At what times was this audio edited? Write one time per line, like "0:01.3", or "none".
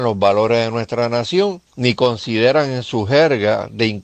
0:01.7